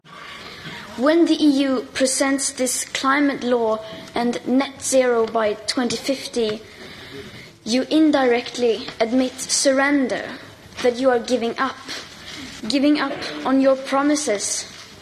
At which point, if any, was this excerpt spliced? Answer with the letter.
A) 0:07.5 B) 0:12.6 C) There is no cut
B